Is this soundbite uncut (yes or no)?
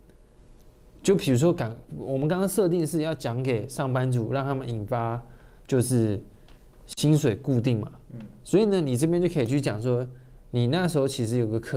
yes